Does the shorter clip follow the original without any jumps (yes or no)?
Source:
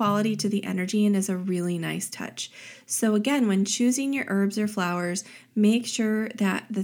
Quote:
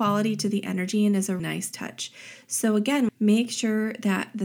no